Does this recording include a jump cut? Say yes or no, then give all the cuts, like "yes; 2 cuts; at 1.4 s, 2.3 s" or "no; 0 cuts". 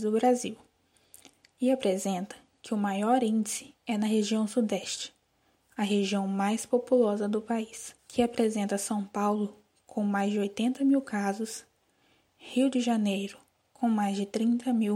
yes; 1 cut; at 8.0 s